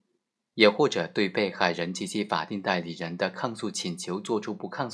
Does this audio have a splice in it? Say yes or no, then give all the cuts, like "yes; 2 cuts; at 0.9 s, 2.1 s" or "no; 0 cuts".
no; 0 cuts